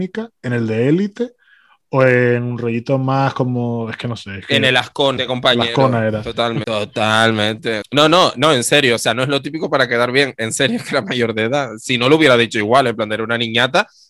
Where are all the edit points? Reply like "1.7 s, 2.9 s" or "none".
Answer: 5.2 s, 6.6 s, 7.8 s